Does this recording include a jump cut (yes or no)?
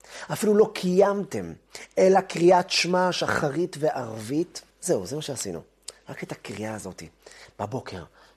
yes